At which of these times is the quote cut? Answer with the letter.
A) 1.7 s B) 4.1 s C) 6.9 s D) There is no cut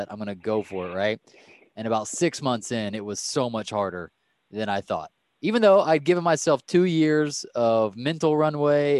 D